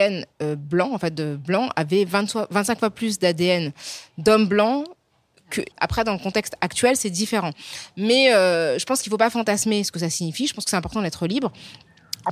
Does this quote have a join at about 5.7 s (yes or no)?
yes